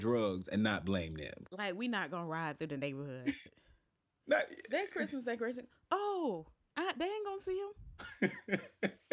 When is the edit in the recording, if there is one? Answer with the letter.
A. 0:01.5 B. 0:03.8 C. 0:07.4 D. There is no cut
A